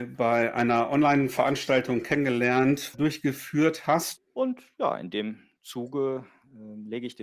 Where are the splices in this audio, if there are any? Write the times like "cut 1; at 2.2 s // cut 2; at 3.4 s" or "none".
cut 1; at 2.9 s // cut 2; at 4.2 s